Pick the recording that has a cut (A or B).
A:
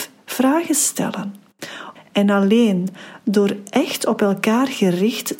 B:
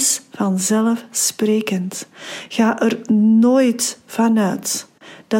A